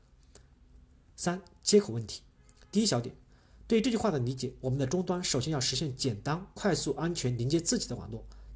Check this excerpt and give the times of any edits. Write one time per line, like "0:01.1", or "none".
none